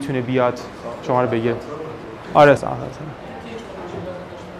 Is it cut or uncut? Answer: cut